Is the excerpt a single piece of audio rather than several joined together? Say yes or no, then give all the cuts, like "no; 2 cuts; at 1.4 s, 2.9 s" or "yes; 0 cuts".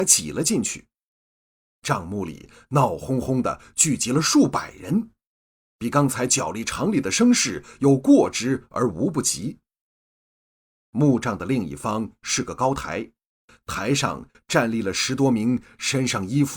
yes; 0 cuts